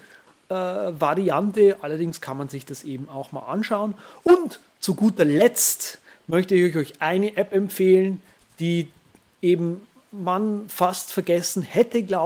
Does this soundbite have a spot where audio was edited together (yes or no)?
no